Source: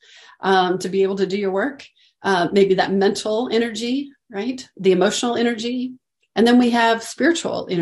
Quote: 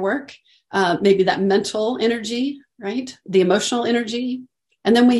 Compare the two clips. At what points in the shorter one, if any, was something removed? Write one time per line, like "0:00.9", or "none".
none